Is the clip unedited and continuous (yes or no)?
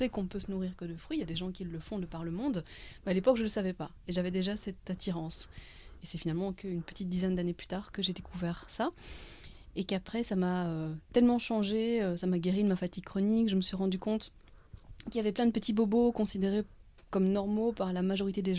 yes